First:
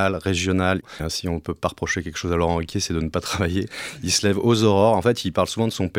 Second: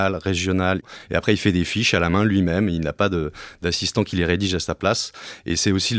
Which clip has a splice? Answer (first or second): first